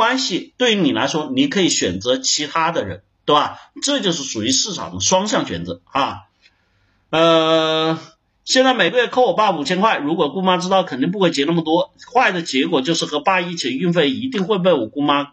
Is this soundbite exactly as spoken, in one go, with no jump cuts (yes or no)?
yes